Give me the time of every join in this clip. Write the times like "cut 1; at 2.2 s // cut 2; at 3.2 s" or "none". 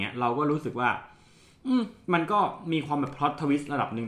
none